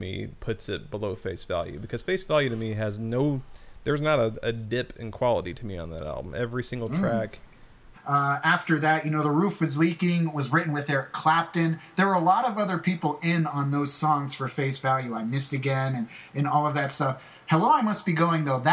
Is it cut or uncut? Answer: cut